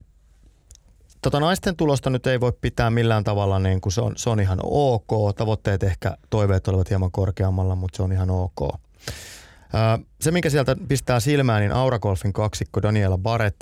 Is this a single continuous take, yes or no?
yes